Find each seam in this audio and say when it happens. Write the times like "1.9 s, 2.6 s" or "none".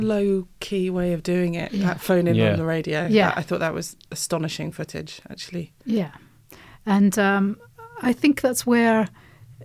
none